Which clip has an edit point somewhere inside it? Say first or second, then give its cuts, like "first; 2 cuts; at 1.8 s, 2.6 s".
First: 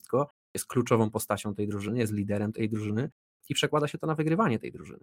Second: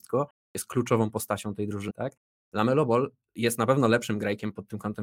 second; 1 cut; at 1.9 s